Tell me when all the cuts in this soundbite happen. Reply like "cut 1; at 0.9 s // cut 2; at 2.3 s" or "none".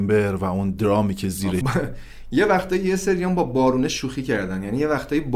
cut 1; at 1.6 s